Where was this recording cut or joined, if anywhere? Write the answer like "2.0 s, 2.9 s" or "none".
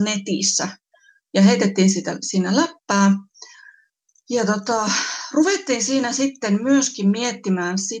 none